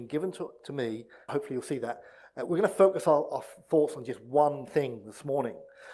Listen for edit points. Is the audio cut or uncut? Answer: cut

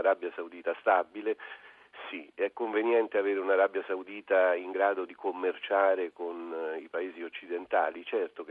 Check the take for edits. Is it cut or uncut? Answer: uncut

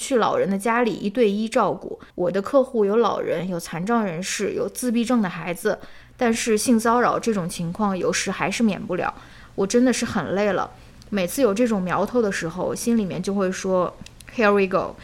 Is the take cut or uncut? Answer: cut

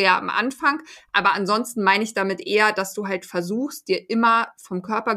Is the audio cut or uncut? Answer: uncut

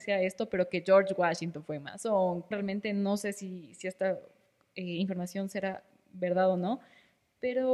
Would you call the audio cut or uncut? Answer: cut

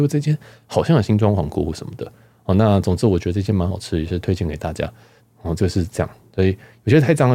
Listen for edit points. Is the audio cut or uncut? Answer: cut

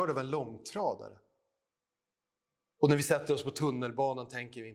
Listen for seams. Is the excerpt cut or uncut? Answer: uncut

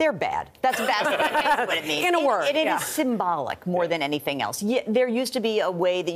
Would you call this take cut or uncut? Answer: uncut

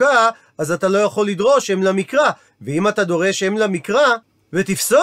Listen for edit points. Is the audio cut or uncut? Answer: uncut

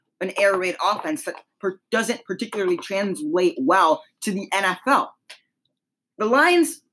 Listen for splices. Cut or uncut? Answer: uncut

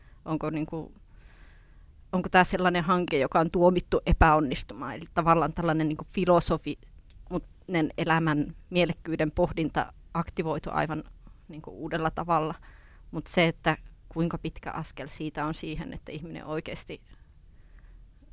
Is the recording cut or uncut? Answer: uncut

